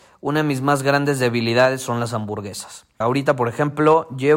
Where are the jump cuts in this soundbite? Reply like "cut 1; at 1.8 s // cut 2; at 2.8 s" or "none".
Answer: cut 1; at 3.0 s